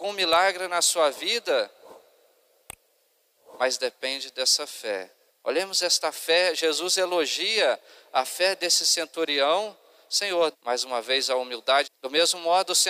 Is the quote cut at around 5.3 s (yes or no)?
yes